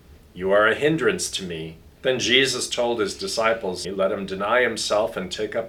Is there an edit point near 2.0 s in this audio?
yes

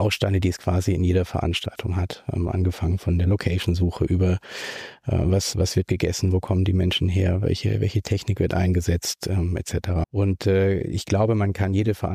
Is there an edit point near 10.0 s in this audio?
yes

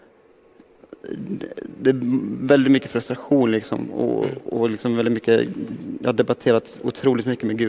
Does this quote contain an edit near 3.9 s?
no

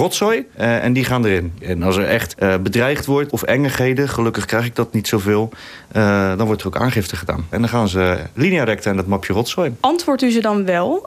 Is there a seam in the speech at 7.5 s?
yes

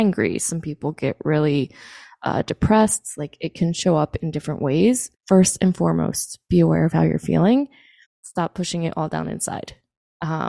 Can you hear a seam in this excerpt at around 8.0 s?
yes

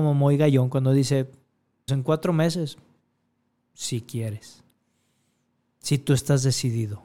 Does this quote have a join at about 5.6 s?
no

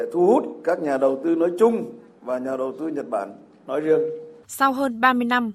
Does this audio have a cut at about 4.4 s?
yes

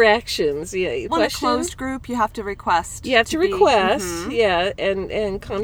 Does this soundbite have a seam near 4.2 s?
no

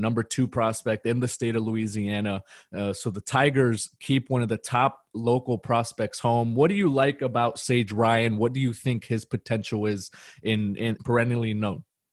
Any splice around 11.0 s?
yes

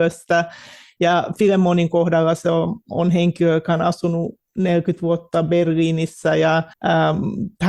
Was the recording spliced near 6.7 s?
yes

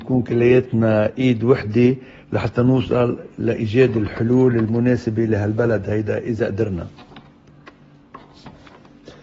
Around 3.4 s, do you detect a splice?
no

